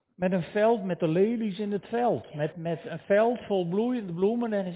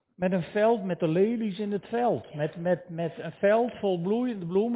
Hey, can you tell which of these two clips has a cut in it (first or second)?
first